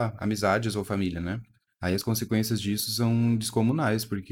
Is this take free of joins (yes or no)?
no